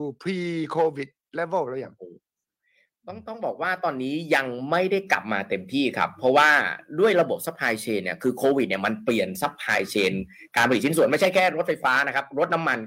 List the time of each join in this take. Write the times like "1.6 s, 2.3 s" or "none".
none